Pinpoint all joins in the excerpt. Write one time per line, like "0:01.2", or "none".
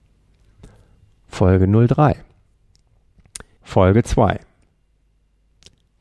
0:03.6